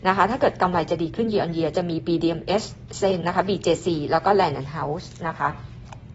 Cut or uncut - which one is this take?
cut